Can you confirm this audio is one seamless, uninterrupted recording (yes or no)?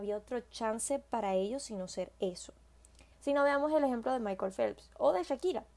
no